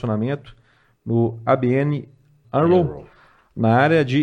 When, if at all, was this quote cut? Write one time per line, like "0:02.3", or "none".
0:02.4